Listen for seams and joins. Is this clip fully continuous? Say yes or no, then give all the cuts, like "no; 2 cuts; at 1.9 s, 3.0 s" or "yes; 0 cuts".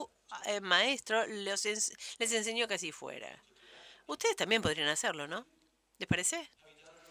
yes; 0 cuts